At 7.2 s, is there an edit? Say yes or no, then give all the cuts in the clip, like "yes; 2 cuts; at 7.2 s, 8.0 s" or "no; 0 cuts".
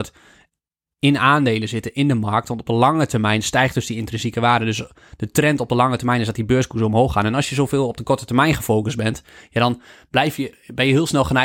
no; 0 cuts